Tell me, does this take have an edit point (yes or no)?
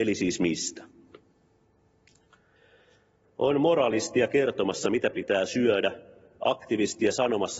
yes